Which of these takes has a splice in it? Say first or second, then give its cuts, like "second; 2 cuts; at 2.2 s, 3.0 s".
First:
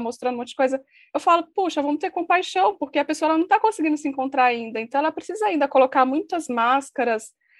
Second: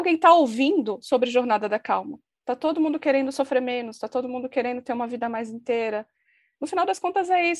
second; 1 cut; at 2.3 s